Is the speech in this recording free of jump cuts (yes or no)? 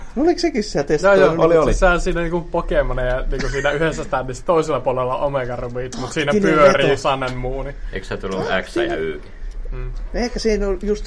yes